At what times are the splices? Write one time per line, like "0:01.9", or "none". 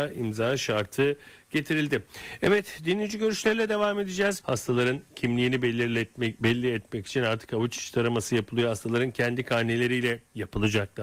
0:04.4